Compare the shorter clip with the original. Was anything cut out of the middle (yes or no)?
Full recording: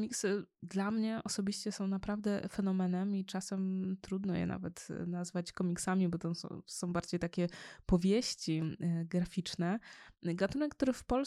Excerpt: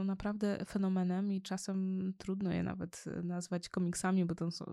no